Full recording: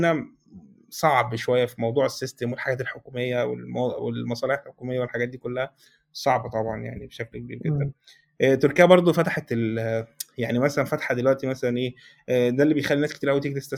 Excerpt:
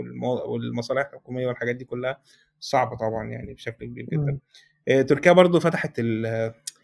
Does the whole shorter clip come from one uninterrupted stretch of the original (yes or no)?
yes